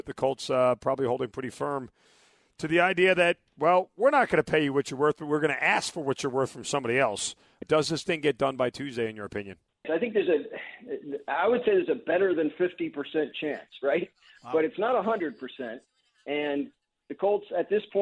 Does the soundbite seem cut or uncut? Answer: cut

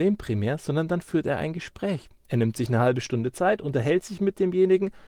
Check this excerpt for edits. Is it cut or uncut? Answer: uncut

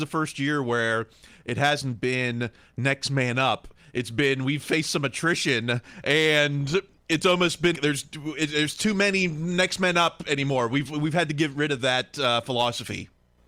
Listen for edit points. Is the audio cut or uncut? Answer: cut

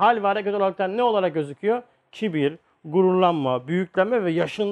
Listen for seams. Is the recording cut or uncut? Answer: uncut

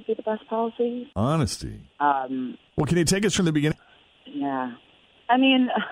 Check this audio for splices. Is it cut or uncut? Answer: cut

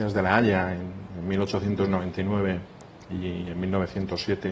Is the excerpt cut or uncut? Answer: uncut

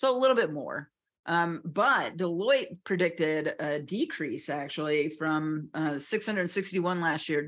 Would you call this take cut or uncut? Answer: uncut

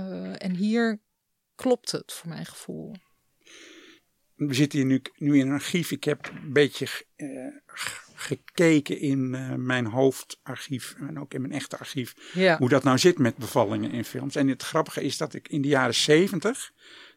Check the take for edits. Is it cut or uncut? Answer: uncut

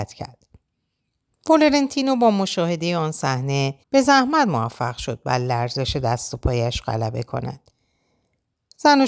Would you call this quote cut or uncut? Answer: cut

